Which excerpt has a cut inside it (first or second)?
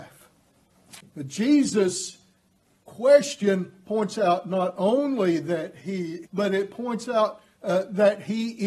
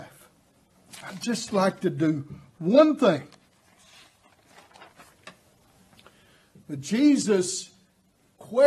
first